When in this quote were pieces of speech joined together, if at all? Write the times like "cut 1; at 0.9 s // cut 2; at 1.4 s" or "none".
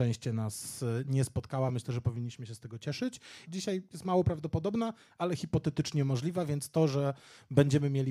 cut 1; at 3.4 s